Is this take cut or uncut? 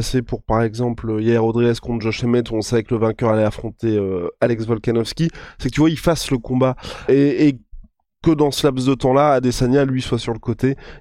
cut